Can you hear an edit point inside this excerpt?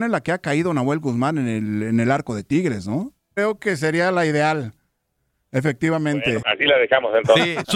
yes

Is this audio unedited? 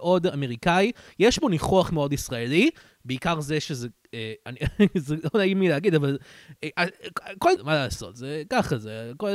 no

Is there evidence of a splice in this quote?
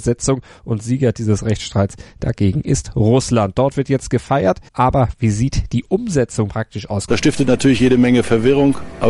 yes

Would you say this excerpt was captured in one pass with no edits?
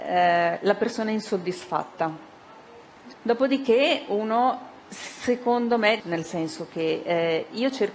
no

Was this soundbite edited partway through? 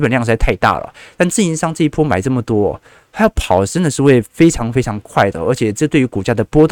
no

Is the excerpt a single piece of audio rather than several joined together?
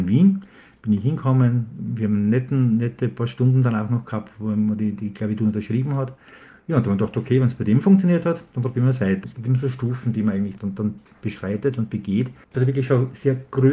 no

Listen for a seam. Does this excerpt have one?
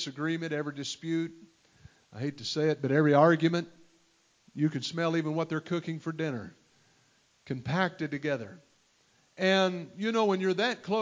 no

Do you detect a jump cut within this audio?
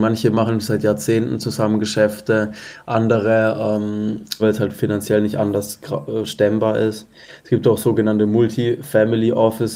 yes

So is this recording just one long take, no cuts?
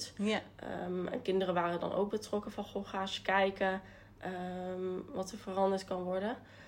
yes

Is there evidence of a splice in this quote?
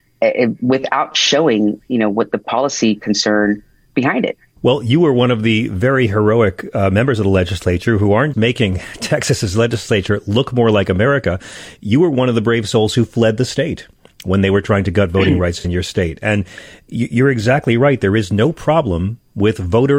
yes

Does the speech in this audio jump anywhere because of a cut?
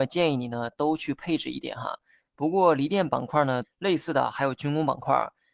yes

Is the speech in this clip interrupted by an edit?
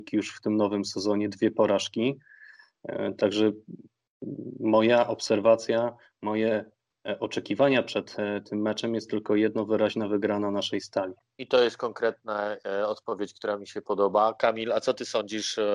no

